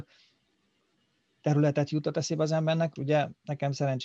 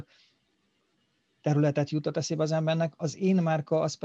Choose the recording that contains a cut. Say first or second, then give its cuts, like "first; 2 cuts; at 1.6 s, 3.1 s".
first; 1 cut; at 3.0 s